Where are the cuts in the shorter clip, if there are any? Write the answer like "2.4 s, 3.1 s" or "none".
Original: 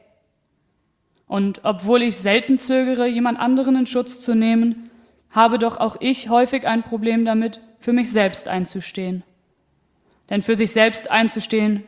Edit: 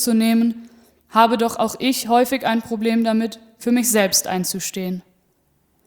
none